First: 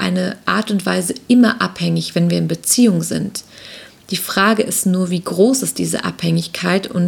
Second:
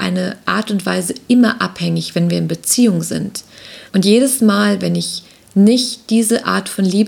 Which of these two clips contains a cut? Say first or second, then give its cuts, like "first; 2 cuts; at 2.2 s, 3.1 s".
second; 1 cut; at 3.9 s